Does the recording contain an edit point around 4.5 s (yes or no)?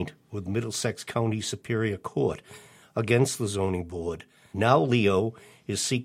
yes